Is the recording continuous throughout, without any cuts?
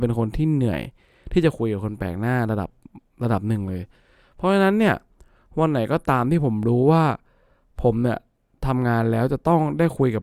yes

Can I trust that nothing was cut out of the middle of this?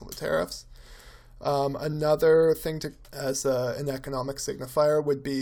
no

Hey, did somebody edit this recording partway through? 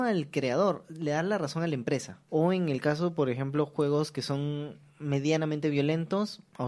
yes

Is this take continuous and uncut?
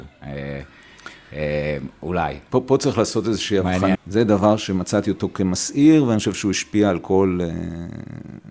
no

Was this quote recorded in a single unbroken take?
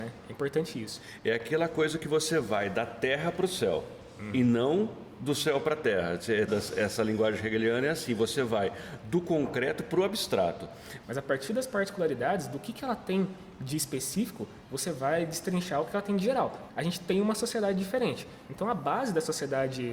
no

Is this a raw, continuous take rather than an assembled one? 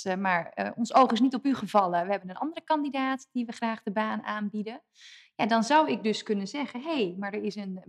yes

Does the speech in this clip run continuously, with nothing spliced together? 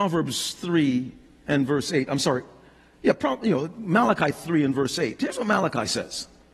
yes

